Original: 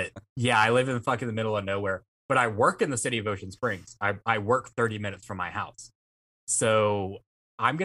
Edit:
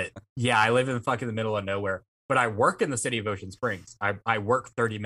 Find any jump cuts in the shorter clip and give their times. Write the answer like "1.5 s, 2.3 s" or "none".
none